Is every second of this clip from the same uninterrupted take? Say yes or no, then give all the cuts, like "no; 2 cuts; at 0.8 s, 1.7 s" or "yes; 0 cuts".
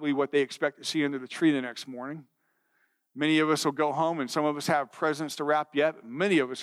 yes; 0 cuts